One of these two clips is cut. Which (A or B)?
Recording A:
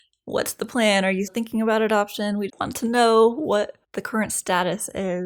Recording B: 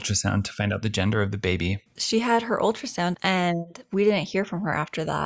A